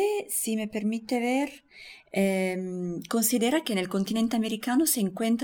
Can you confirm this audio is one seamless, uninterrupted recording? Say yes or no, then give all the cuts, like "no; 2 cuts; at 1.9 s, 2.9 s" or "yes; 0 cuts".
yes; 0 cuts